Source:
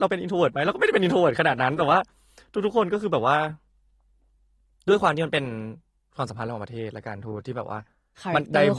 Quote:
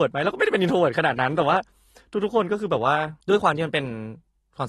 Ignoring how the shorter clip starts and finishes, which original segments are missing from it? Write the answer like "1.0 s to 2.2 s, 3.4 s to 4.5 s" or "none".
3.6 s to 4.8 s